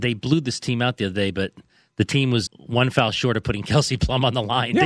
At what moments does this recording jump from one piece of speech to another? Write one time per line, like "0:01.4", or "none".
0:02.5